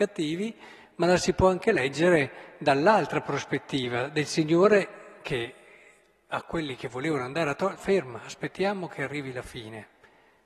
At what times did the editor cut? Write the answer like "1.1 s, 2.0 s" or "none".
7.8 s